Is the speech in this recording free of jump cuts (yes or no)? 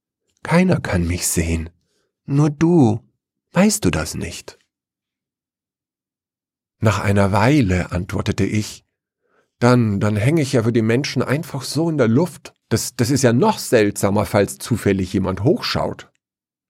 no